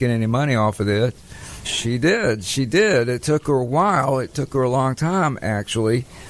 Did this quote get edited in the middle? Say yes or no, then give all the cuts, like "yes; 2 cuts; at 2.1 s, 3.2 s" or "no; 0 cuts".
yes; 1 cut; at 1.6 s